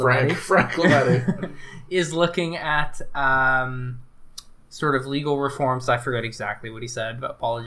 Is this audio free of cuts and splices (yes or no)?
yes